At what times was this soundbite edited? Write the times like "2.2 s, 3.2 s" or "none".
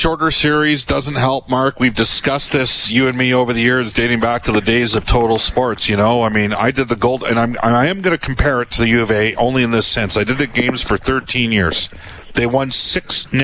none